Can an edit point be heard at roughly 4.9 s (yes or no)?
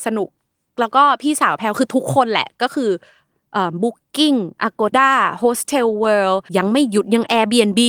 yes